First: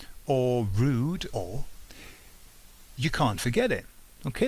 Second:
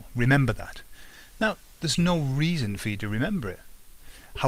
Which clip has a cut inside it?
first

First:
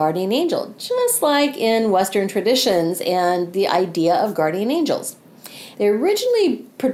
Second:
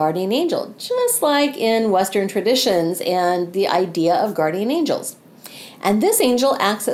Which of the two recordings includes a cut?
first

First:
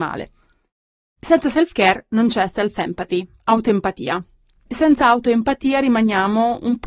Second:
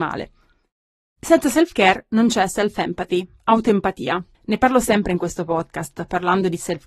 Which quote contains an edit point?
second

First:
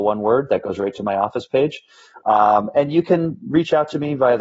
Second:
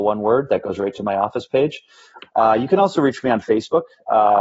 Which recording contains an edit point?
second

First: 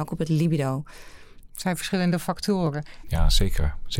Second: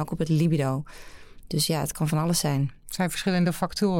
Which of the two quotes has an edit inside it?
first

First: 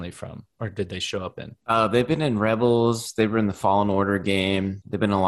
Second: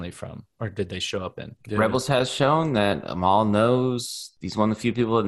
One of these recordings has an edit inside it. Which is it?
second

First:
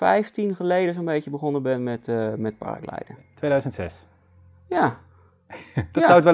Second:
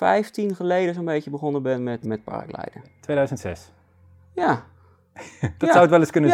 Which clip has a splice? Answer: second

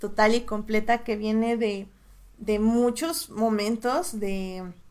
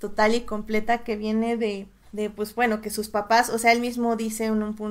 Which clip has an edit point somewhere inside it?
second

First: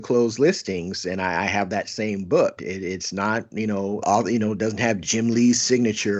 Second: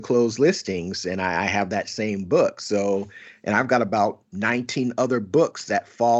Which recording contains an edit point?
first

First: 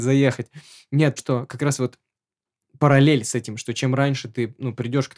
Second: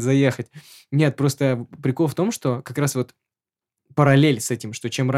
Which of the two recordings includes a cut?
first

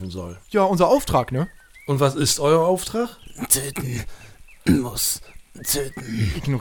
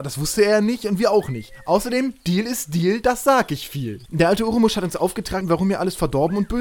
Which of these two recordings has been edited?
second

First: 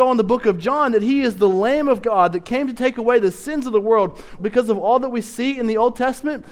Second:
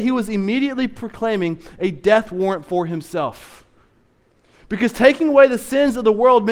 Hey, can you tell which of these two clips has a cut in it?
first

